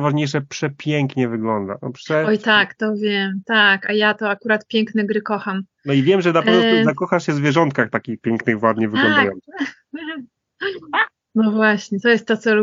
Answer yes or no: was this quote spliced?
no